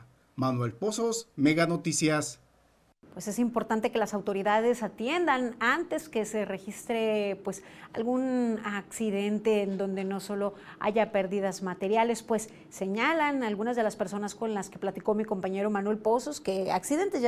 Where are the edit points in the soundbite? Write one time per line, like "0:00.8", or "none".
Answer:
none